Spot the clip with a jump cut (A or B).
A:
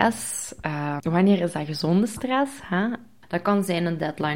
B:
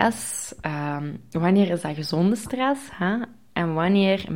A